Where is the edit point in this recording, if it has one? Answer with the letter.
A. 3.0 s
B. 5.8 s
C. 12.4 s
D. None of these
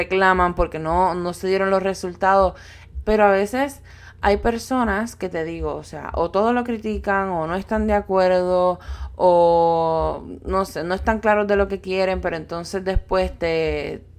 A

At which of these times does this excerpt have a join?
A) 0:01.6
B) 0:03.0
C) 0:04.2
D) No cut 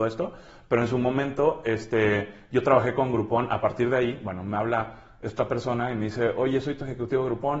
D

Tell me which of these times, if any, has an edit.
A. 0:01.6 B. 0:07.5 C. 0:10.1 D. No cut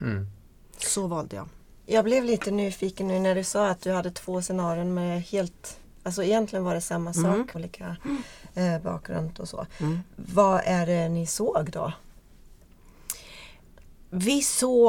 B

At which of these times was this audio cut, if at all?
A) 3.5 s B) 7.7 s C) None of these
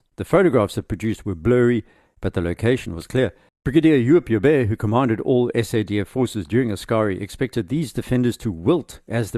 A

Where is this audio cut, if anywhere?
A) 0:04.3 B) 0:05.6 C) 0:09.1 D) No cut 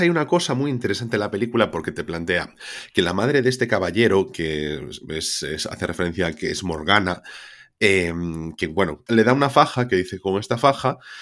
C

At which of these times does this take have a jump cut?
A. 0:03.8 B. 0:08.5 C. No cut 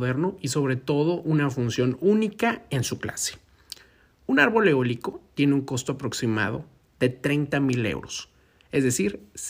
C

